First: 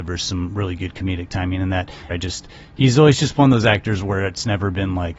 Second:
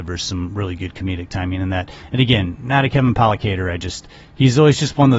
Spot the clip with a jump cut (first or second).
first